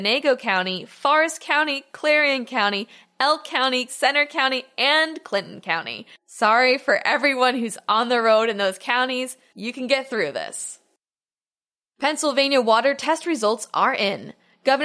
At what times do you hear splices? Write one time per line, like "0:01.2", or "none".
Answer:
0:03.9